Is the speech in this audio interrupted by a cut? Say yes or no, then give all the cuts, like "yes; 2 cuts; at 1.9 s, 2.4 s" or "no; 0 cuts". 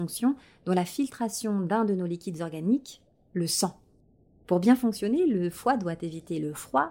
no; 0 cuts